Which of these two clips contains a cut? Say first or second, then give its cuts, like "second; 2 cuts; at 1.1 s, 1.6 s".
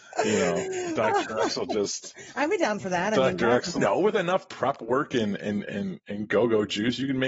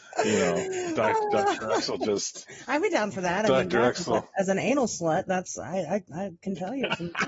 first; 2 cuts; at 1.1 s, 3.8 s